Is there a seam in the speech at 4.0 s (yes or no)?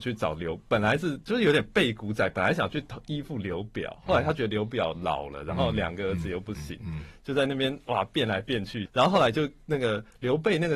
no